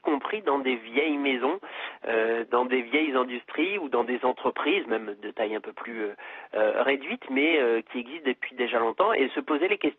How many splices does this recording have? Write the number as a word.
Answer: zero